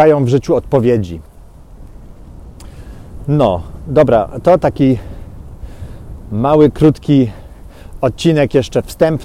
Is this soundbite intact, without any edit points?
yes; 0 cuts

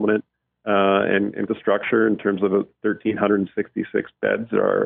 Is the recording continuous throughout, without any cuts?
no; 1 cut; at 1.5 s

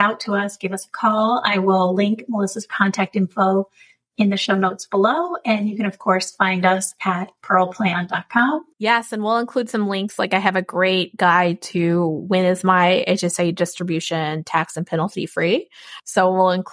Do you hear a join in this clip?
no; 0 cuts

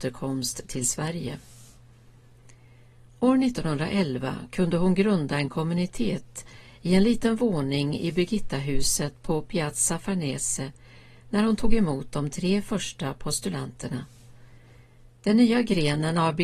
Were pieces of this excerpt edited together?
no; 0 cuts

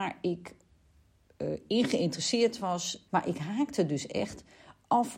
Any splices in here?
yes; 1 cut; at 3.1 s

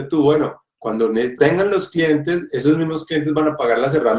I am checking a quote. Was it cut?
yes; 1 cut; at 1.4 s

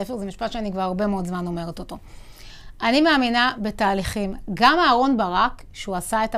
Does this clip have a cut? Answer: no; 0 cuts

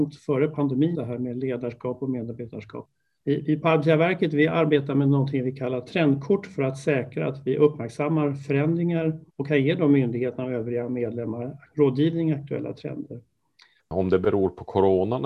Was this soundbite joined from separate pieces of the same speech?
yes; 3 cuts; at 0.9 s, 9.3 s, 13.8 s

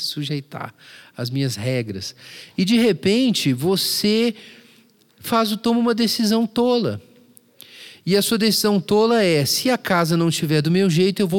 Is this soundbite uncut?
yes; 0 cuts

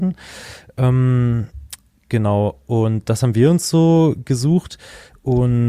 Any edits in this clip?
no; 0 cuts

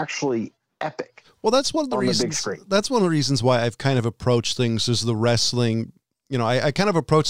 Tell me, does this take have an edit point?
no; 0 cuts

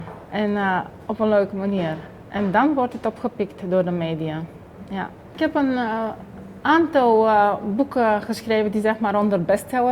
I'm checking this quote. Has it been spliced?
no; 0 cuts

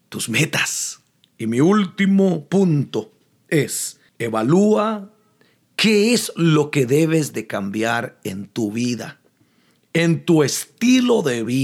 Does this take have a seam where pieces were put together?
yes; 2 cuts; at 1.2 s, 4.1 s

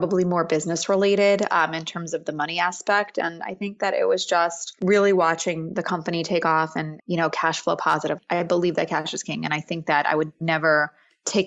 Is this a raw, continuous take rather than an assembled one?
no; 1 cut; at 7.0 s

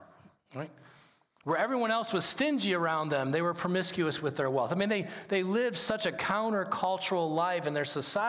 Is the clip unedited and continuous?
yes; 0 cuts

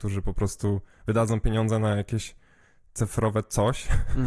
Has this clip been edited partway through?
no; 0 cuts

